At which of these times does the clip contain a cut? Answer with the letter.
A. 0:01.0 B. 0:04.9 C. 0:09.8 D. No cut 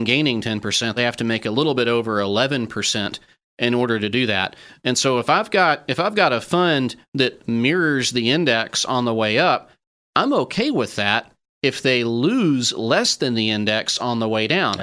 A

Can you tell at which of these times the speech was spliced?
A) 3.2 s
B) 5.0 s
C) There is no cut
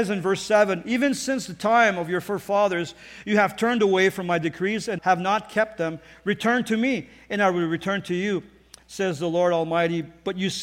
B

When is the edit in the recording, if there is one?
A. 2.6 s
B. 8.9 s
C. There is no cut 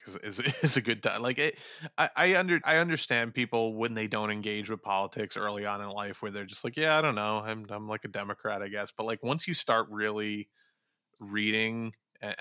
A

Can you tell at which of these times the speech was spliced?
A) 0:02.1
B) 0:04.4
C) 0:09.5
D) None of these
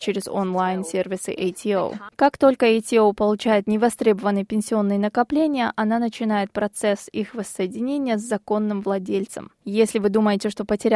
A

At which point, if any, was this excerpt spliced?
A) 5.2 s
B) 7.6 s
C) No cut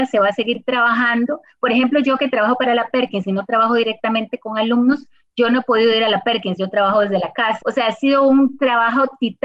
B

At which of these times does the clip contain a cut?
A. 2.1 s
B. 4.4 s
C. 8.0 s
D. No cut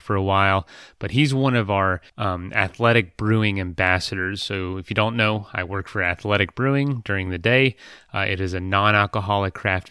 A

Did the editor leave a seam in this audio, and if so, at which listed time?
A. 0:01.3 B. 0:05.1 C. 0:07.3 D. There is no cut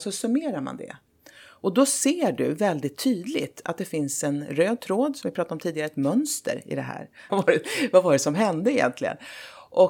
C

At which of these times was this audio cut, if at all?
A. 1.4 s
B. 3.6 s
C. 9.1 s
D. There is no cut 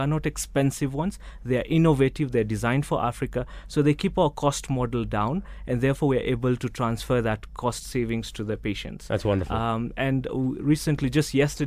D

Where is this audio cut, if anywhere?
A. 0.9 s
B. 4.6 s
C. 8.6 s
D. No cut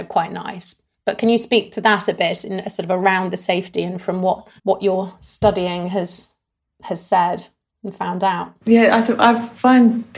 B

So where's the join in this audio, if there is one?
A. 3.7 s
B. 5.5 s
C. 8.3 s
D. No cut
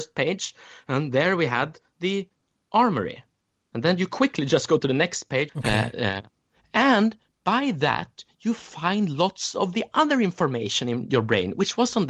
B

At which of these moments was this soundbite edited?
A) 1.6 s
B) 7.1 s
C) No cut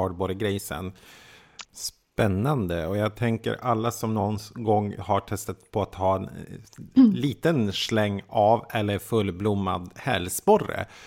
A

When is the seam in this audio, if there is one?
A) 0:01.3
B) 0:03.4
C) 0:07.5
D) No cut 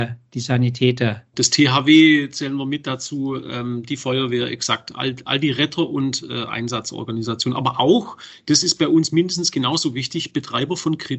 A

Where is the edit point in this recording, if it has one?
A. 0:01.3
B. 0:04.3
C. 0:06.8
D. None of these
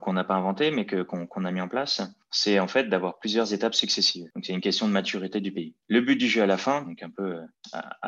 C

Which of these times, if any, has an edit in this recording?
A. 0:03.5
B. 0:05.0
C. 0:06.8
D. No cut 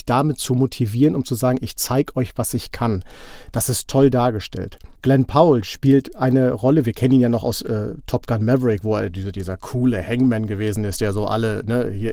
B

